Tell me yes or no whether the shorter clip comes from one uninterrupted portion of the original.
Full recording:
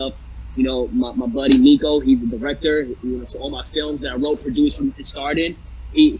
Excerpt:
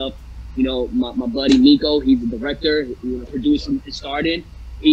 no